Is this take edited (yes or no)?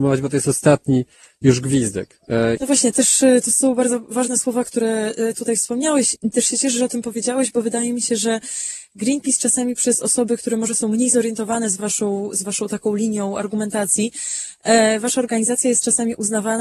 yes